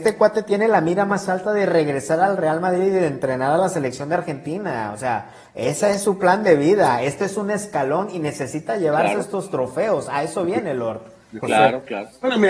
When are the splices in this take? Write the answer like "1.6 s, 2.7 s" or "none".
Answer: none